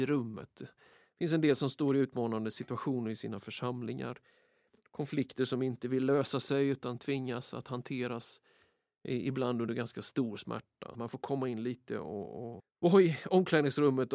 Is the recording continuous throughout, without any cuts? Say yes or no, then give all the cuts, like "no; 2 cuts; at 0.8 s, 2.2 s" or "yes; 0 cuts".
no; 2 cuts; at 10.9 s, 12.6 s